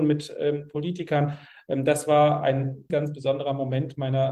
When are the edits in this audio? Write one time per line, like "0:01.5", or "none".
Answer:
0:02.9